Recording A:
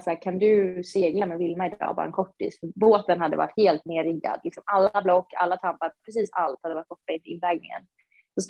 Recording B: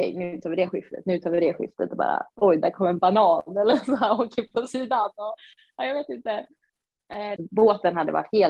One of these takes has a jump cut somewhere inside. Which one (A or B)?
B